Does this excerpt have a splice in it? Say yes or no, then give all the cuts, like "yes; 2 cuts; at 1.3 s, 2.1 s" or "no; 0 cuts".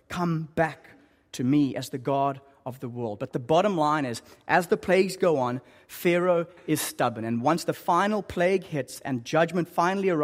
no; 0 cuts